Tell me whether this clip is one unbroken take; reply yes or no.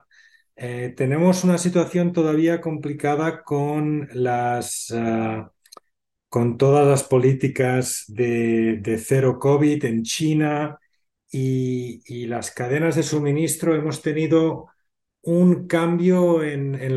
yes